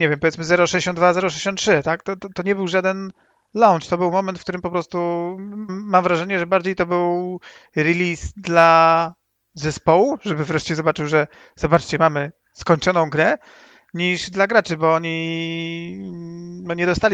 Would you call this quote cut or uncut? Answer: cut